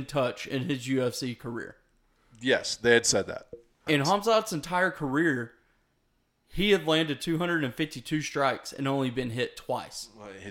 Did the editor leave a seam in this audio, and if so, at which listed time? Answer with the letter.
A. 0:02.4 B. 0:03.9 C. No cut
B